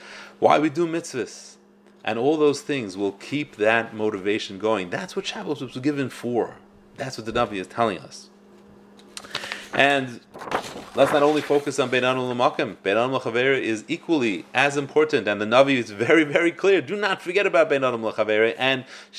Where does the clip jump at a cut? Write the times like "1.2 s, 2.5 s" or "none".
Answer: none